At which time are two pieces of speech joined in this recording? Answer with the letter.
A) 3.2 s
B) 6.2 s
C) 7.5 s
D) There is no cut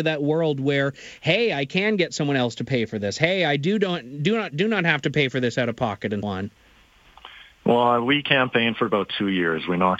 B